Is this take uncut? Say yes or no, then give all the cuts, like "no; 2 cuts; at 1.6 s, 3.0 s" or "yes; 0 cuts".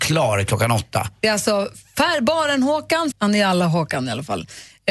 no; 1 cut; at 3.1 s